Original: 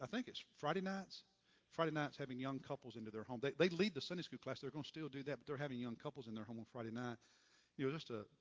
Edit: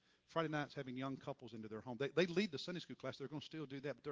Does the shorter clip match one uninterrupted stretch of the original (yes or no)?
yes